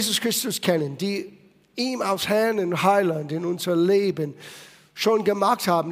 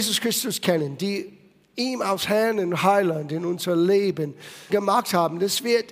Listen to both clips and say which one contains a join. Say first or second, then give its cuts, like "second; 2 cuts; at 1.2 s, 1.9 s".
second; 1 cut; at 4.7 s